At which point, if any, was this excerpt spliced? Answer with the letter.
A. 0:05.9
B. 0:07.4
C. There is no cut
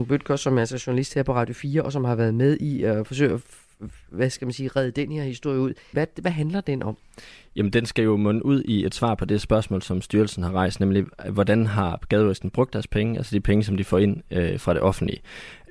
A